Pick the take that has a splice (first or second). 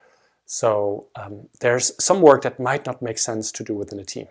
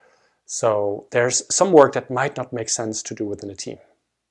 second